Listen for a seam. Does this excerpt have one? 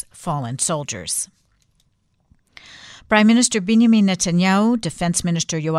no; 0 cuts

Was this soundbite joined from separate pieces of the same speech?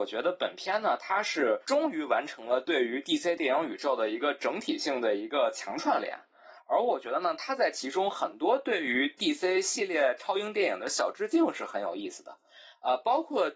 no; 0 cuts

